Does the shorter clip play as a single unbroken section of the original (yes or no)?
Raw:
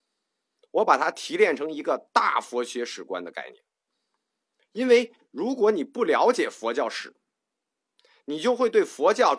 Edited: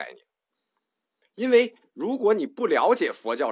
yes